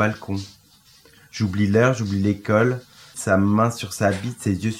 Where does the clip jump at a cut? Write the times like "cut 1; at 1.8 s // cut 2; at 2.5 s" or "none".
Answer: cut 1; at 3.1 s